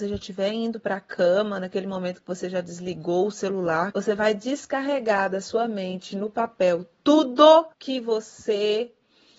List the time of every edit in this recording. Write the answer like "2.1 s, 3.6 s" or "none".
3.9 s, 7.7 s